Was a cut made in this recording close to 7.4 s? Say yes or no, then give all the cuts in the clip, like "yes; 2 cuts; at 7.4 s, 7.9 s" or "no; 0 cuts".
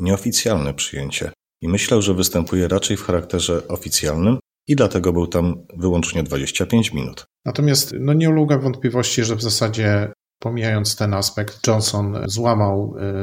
yes; 1 cut; at 7.4 s